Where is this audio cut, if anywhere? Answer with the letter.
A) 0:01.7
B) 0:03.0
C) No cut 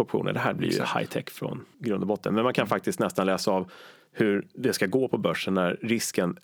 A